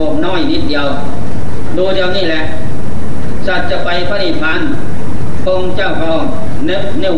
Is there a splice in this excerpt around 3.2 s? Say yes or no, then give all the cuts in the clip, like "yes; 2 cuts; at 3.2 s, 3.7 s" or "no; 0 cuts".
no; 1 cut; at 4.5 s